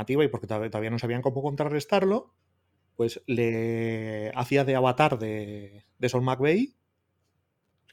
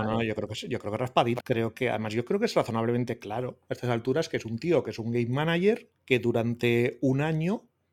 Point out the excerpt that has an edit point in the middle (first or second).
second